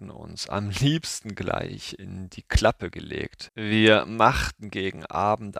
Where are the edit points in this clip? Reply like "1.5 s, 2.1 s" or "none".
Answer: 3.5 s